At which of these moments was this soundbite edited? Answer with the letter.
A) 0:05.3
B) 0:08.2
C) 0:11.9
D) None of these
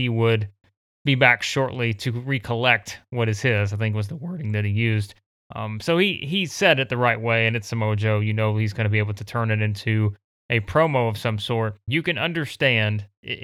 C